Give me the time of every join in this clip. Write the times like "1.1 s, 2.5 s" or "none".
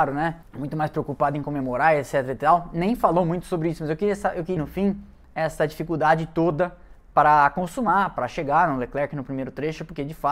4.6 s